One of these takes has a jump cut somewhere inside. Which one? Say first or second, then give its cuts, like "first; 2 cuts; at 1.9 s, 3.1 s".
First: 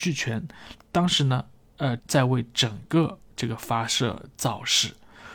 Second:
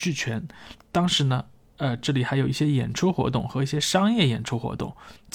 first; 1 cut; at 2.0 s